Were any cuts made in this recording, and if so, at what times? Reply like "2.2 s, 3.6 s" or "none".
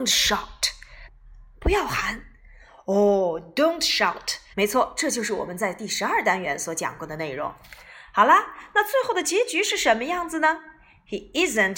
4.5 s